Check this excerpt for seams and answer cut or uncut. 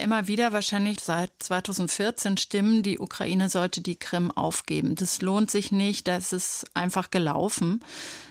cut